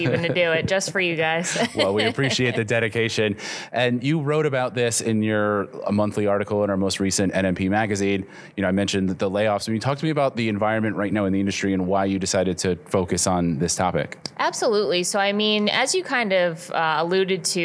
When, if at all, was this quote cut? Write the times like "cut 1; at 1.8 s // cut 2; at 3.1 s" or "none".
none